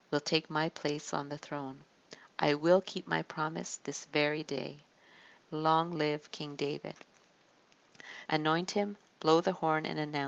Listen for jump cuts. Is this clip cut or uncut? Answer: cut